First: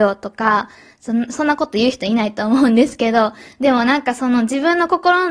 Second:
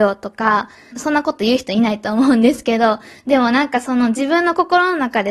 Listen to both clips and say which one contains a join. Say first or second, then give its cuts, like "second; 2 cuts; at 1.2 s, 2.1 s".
second; 1 cut; at 0.9 s